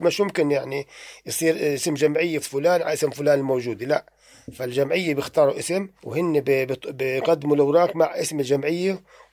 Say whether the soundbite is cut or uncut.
cut